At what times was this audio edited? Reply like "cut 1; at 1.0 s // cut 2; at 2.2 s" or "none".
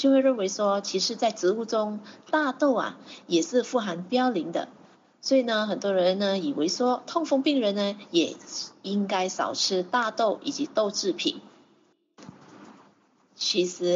none